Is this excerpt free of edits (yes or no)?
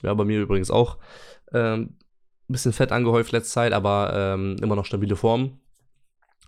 yes